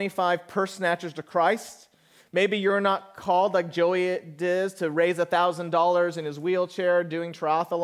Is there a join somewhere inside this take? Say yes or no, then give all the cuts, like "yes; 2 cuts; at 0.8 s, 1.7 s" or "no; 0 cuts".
no; 0 cuts